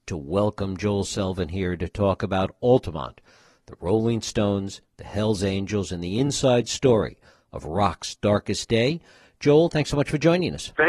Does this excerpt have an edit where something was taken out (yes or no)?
no